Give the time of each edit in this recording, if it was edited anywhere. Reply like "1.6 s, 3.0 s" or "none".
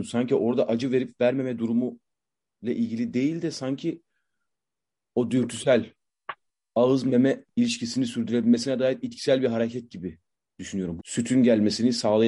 11.0 s